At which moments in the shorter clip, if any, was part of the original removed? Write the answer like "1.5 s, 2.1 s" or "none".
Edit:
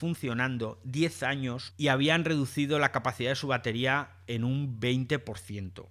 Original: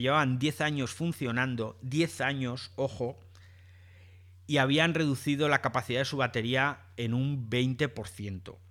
1.7 s